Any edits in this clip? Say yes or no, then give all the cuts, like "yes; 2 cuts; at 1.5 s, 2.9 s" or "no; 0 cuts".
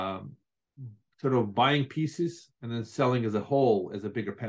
no; 0 cuts